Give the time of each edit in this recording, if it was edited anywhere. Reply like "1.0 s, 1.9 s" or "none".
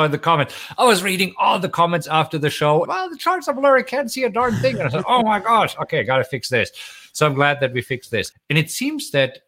2.9 s, 8.3 s